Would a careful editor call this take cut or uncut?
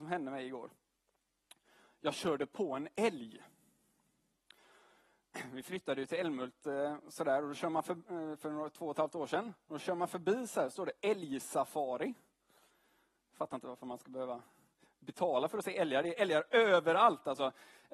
uncut